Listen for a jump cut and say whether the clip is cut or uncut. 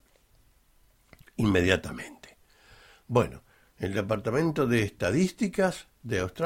uncut